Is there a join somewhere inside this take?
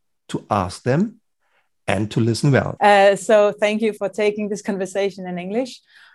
yes; 2 cuts; at 2.8 s, 4.0 s

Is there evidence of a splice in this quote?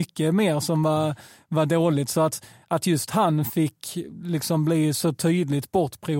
no; 0 cuts

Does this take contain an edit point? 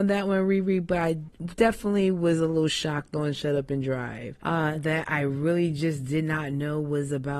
yes; 1 cut; at 4.8 s

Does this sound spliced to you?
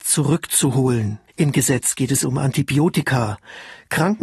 yes; 1 cut; at 1.3 s

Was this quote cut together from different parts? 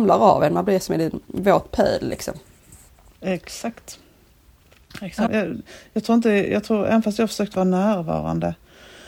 yes; 1 cut; at 5.3 s

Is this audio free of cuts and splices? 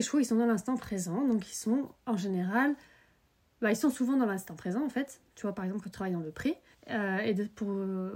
no; 2 cuts; at 2.0 s, 6.7 s

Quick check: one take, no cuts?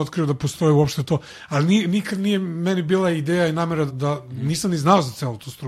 no; 1 cut; at 3.9 s

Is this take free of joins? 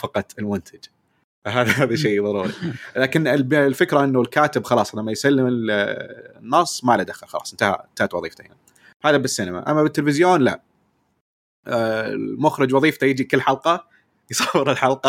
yes; 0 cuts

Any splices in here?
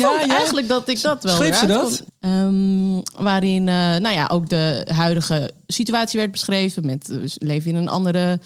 yes; 1 cut; at 2.1 s

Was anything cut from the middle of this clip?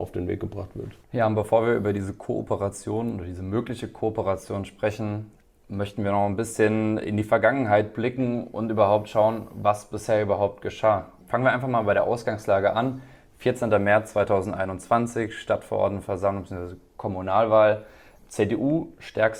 yes; 1 cut; at 1.0 s

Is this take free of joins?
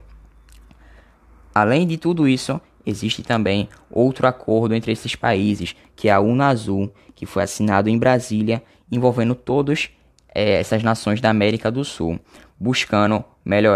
yes; 0 cuts

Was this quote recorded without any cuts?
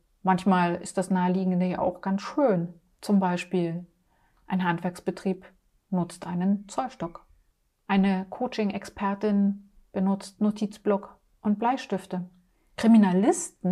yes; 0 cuts

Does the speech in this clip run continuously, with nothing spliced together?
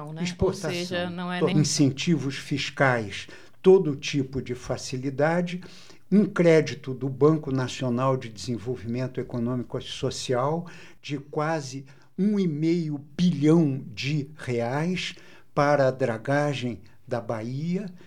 no; 1 cut; at 1.5 s

